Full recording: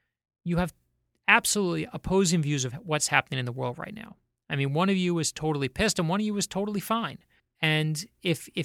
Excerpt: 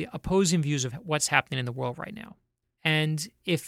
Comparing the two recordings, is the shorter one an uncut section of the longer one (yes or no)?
no